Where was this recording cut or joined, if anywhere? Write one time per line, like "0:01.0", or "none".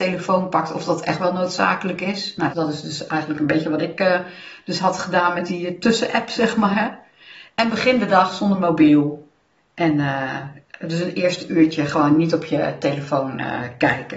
0:02.5